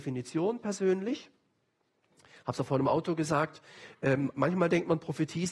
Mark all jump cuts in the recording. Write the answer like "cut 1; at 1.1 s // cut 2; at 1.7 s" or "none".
none